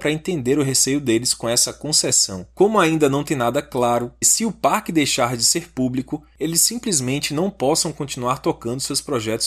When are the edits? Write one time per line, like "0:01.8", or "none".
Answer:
0:04.2